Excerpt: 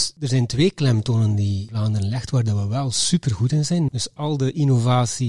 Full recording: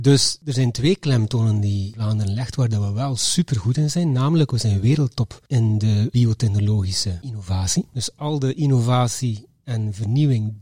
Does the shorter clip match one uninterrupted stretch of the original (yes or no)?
no